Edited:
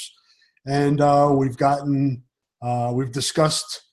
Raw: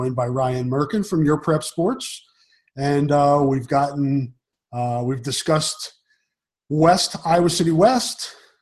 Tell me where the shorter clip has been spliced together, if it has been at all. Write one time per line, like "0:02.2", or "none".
none